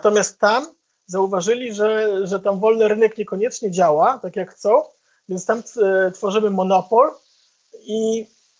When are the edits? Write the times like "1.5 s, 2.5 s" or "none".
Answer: none